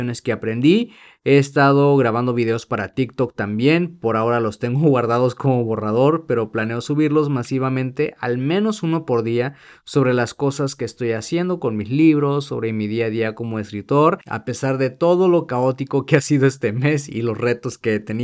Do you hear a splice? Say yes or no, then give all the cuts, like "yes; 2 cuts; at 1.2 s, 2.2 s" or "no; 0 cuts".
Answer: no; 0 cuts